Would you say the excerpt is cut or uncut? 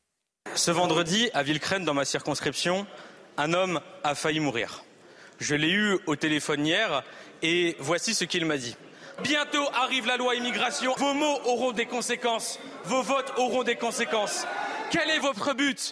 cut